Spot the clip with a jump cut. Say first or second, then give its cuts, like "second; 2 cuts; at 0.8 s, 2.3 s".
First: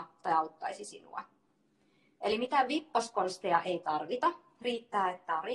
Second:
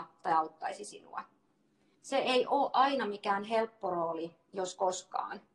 second; 1 cut; at 1.9 s